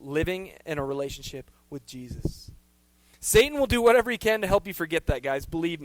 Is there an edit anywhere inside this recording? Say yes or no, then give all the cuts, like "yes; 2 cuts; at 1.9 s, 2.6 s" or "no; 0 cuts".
no; 0 cuts